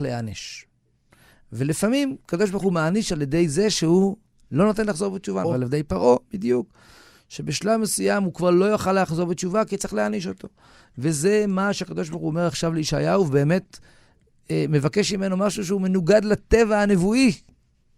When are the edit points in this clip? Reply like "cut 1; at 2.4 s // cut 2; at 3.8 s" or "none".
cut 1; at 5.4 s